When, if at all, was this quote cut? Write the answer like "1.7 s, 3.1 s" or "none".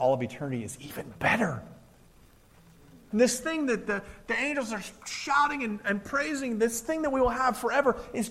3.1 s